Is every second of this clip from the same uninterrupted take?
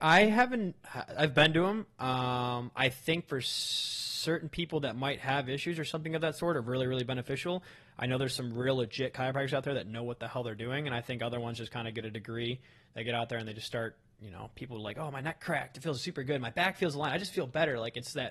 yes; 0 cuts

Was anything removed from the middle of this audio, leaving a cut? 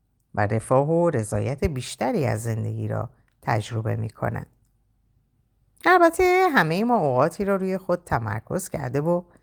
no; 0 cuts

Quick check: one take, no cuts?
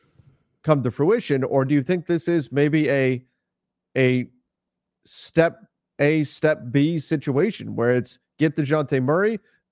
yes; 0 cuts

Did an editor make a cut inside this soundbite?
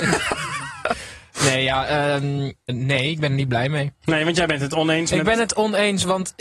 yes; 1 cut; at 2.7 s

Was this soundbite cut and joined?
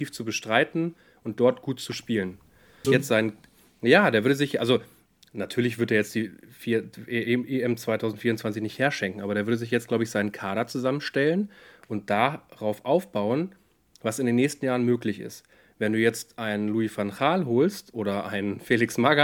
yes; 1 cut; at 2.8 s

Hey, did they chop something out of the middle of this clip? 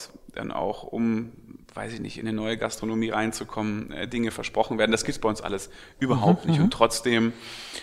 no; 0 cuts

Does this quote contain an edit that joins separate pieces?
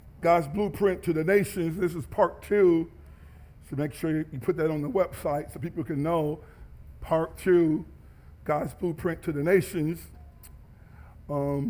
no; 0 cuts

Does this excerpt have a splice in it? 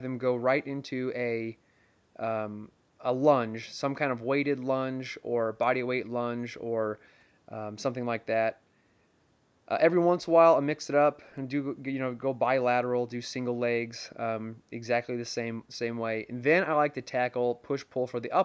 no; 0 cuts

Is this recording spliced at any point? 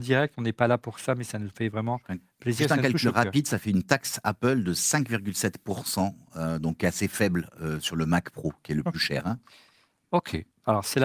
no; 0 cuts

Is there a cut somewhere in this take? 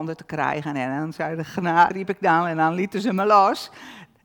yes; 1 cut; at 1.9 s

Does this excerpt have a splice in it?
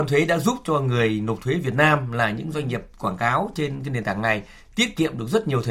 no; 0 cuts

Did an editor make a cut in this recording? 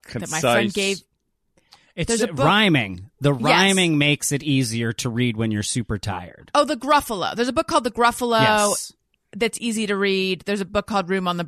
no; 0 cuts

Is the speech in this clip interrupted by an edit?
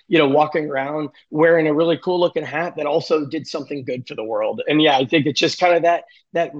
no; 0 cuts

